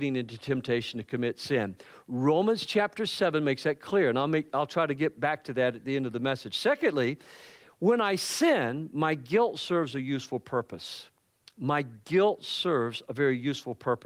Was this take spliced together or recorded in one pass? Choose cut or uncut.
uncut